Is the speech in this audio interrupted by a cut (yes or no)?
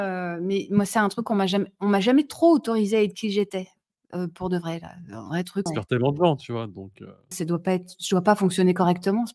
yes